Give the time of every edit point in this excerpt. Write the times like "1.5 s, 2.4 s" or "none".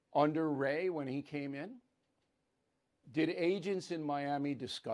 3.0 s